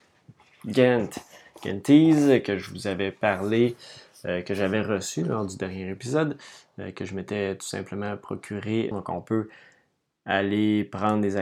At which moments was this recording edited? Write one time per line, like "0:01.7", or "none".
0:08.9